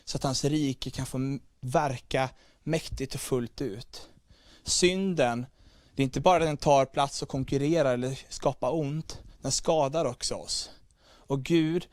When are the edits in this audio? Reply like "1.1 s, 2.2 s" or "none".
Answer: none